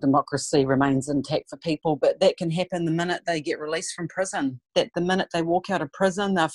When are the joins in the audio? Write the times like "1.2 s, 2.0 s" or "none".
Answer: 4.7 s